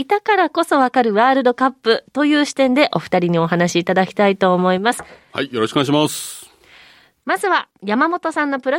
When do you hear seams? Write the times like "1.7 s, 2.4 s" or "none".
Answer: 5.3 s